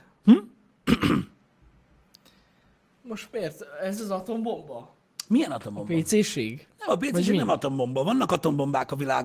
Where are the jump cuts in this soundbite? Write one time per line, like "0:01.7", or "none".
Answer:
none